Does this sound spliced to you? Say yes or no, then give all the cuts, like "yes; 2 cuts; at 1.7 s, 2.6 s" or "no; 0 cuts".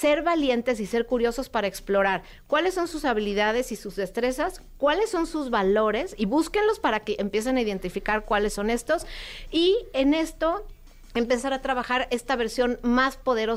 no; 0 cuts